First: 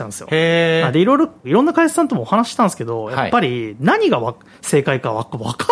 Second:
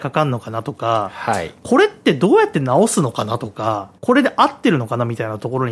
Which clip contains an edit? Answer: second; 1 cut; at 4.0 s

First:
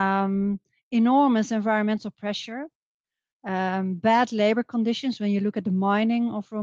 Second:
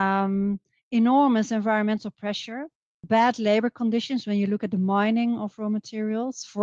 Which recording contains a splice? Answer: second; 1 cut; at 3.0 s

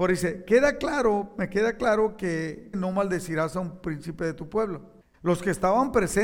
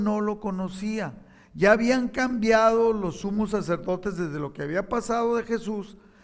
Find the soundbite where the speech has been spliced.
first; 2 cuts; at 2.7 s, 5.1 s

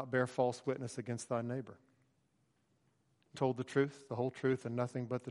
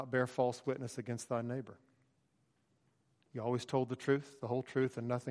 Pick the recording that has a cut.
first; 1 cut; at 3.3 s

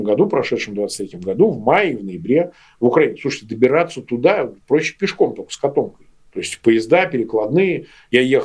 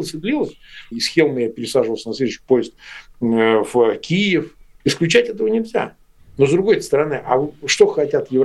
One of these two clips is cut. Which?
second; 2 cuts; at 0.9 s, 4.8 s

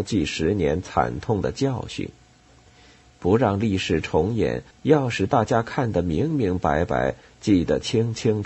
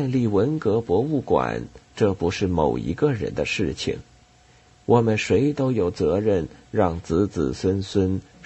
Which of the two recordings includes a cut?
first; 1 cut; at 4.7 s

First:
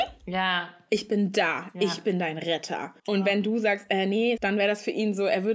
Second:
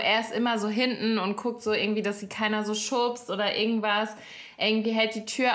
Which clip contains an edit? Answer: first; 2 cuts; at 3.0 s, 4.4 s

